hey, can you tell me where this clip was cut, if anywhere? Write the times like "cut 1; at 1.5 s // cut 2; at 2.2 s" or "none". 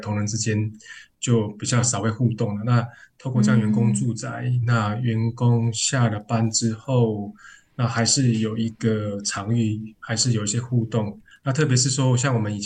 none